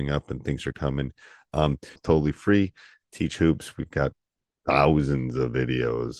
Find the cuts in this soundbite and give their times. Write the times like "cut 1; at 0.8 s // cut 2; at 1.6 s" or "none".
cut 1; at 2.0 s